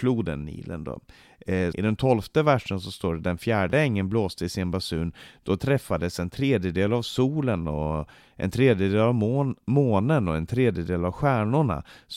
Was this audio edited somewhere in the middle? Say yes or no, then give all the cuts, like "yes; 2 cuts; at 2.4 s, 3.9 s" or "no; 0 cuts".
yes; 1 cut; at 1.7 s